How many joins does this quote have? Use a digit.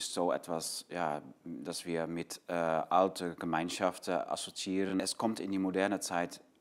0